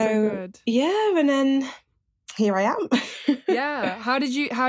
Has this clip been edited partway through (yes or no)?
no